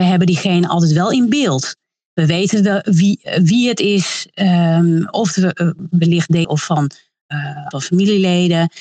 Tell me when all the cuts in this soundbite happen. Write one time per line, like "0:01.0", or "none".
0:06.4
0:07.7